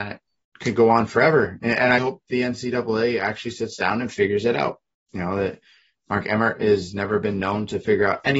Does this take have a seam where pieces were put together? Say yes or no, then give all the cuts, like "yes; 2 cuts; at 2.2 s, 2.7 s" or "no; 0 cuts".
yes; 1 cut; at 2.0 s